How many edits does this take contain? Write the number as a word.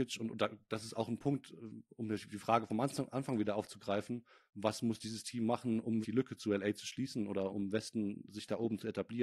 two